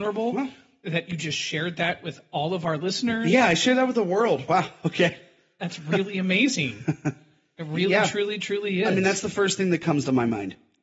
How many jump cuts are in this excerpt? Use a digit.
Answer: 0